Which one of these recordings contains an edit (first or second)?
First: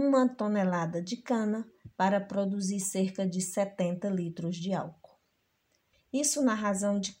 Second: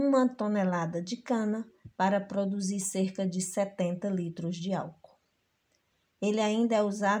first